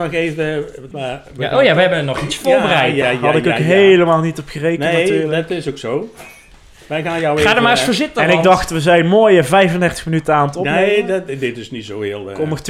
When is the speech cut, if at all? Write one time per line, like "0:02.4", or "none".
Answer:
0:00.9
0:03.0